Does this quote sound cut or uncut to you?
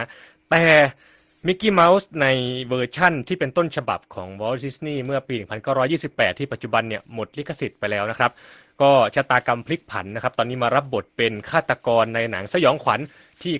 uncut